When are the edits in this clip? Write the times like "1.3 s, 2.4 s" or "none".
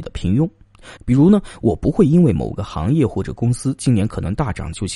1.0 s

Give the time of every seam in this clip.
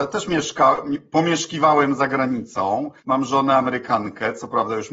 3.0 s

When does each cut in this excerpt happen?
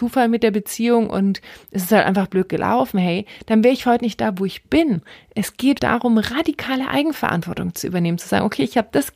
5.8 s

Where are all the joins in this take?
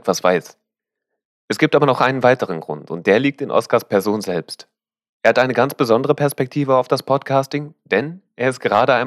none

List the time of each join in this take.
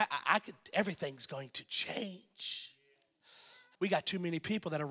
3.7 s

